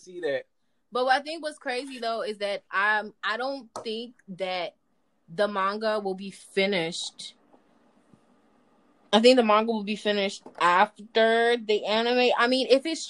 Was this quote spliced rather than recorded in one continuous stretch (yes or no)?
yes